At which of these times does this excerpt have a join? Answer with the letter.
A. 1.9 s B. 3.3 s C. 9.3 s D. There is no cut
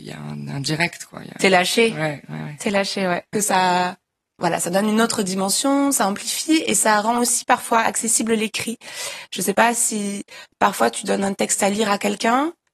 B